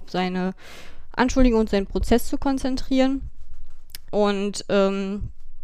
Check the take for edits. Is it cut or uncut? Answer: cut